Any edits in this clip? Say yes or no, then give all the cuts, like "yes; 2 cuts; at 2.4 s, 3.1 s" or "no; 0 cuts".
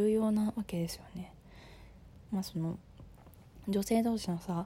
yes; 1 cut; at 2.3 s